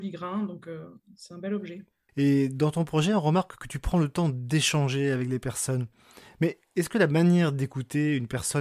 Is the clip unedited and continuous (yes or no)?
no